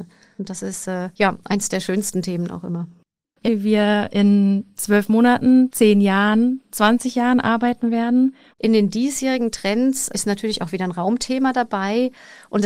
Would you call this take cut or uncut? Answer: cut